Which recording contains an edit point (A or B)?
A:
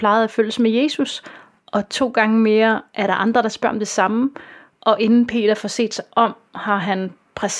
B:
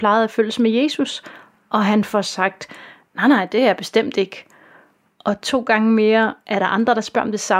A